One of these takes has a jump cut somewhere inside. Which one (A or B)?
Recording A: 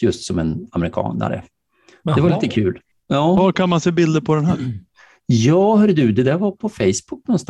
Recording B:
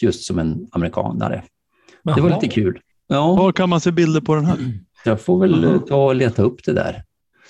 B